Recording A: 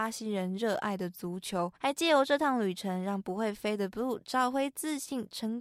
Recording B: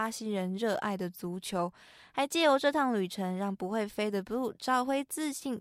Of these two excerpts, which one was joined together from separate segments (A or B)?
A